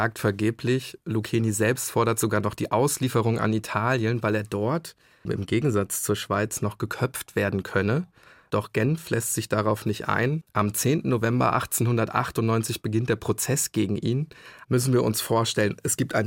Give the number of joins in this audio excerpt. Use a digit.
1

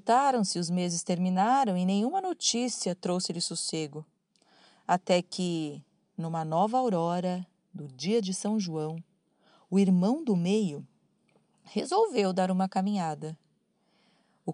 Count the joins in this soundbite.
0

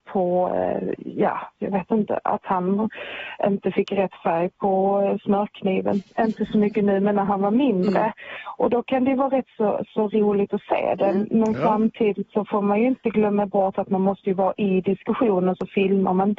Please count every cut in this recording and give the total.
0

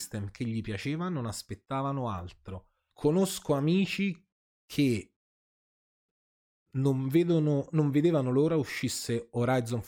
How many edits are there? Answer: 1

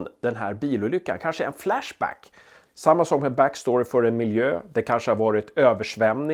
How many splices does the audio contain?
1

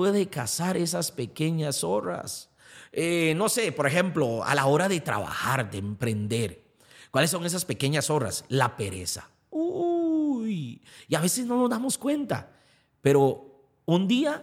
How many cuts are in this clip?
0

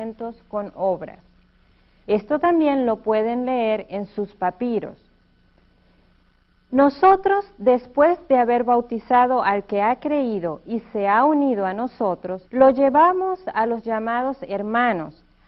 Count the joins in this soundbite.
2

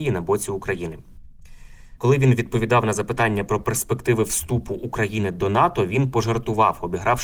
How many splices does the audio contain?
1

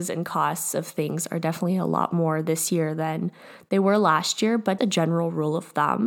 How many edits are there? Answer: 1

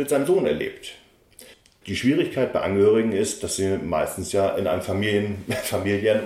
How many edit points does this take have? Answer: 1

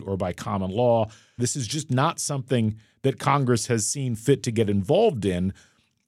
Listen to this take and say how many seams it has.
1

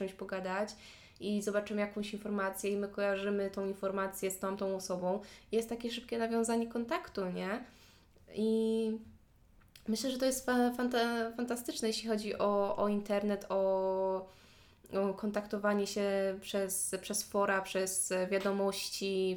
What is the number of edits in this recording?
0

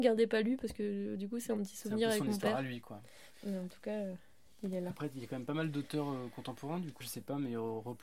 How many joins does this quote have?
2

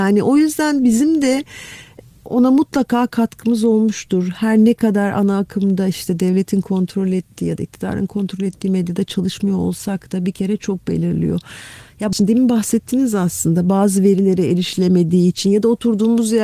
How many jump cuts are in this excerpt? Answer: 0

